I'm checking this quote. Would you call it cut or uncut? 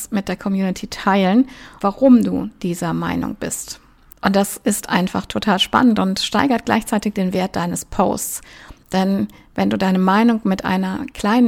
cut